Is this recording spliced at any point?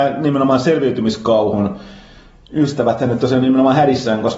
no; 0 cuts

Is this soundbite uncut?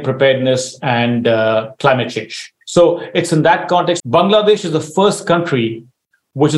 no; 2 cuts; at 2.6 s, 4.0 s

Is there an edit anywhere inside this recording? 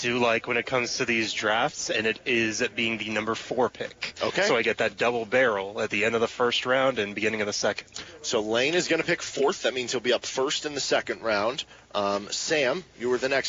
no; 0 cuts

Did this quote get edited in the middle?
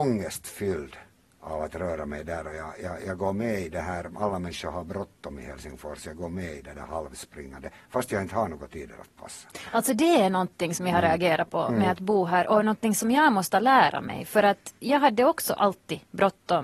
no; 0 cuts

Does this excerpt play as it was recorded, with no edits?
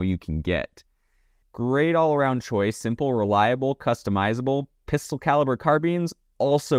no; 1 cut; at 1.4 s

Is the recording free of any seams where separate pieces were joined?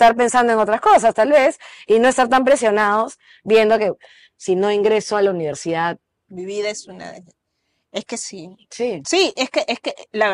yes; 0 cuts

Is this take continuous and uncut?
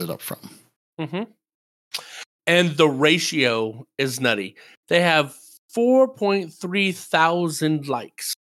yes; 0 cuts

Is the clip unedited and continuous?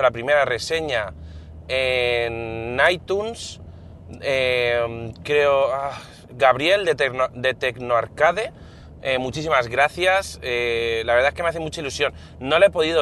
yes; 0 cuts

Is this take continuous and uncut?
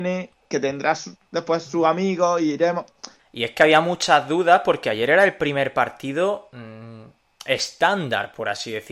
no; 1 cut; at 3.2 s

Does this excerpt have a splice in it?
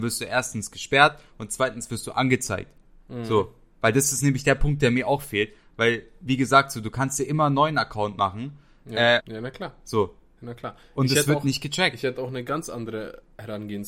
yes; 1 cut; at 9.2 s

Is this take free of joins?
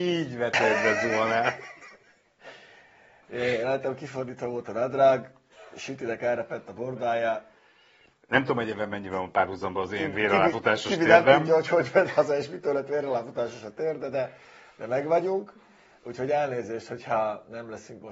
yes; 0 cuts

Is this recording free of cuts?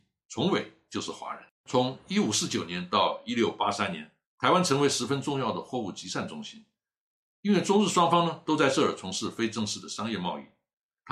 no; 2 cuts; at 1.6 s, 4.2 s

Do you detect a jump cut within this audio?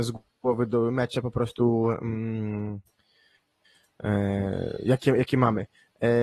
no; 0 cuts

